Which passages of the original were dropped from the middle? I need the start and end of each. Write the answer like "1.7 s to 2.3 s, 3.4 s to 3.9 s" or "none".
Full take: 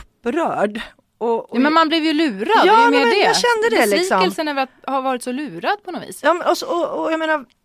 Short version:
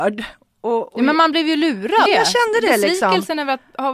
2.6 s to 3.2 s